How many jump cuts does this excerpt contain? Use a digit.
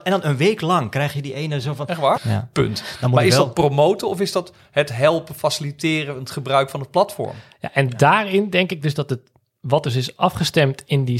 1